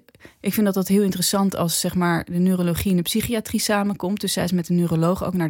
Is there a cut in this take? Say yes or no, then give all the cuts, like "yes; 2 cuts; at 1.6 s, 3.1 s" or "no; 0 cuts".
no; 0 cuts